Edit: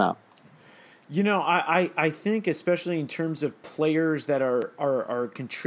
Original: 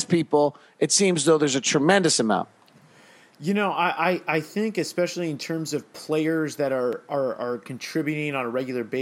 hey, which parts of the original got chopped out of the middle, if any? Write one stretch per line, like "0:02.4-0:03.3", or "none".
none